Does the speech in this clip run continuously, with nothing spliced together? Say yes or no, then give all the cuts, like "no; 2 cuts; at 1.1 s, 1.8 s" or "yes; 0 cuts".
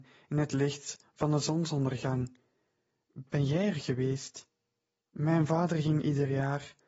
no; 1 cut; at 5.0 s